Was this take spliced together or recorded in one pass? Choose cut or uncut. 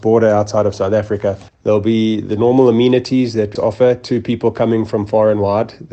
cut